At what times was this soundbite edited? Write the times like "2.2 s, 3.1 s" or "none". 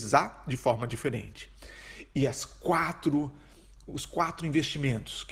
none

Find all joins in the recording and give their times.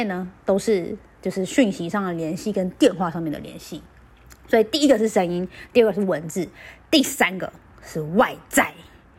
none

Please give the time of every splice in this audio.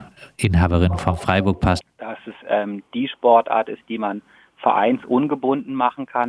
1.8 s

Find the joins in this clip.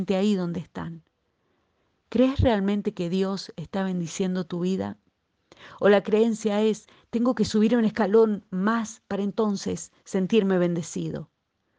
none

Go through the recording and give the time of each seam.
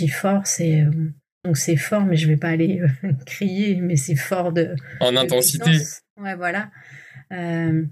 1.4 s

